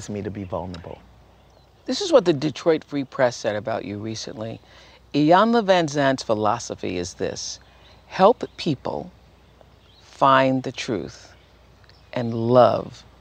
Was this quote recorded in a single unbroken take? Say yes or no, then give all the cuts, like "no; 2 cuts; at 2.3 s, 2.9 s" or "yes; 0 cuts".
yes; 0 cuts